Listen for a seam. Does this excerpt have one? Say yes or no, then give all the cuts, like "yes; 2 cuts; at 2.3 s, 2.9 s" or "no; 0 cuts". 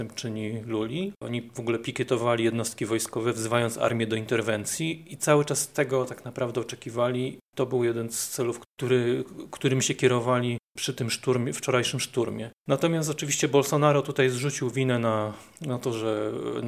yes; 1 cut; at 1.2 s